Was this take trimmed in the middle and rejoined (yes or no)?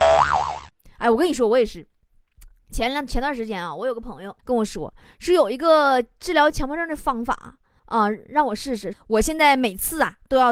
yes